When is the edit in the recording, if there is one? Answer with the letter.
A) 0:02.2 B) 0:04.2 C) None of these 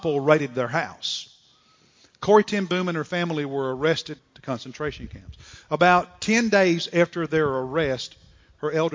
B